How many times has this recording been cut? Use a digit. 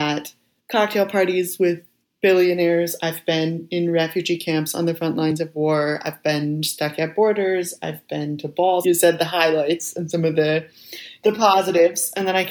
1